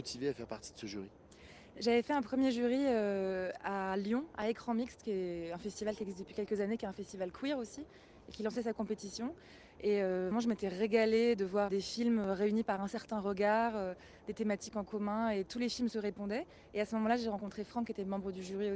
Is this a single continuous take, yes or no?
no